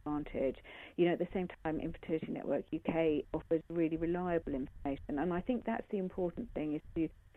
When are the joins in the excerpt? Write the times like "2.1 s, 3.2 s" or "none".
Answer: none